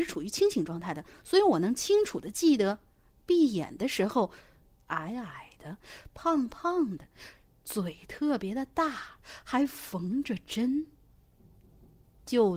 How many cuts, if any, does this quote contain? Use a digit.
1